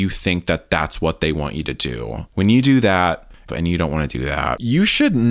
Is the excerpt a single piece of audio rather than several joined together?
no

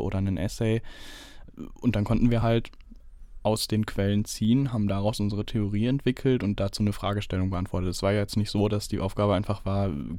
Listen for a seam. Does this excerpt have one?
no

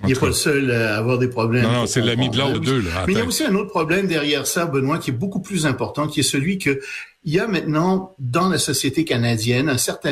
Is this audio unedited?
no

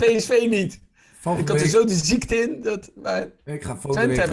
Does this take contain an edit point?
no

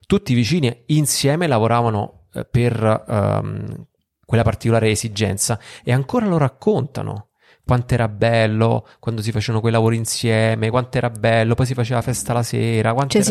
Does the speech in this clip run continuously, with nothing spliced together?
yes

